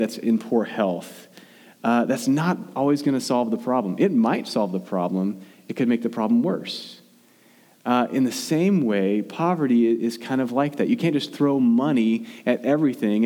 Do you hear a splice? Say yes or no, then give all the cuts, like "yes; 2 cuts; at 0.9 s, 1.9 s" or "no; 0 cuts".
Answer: no; 0 cuts